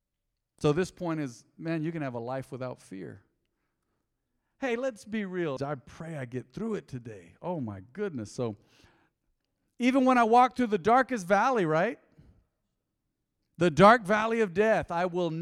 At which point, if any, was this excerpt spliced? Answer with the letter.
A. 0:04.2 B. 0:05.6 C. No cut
B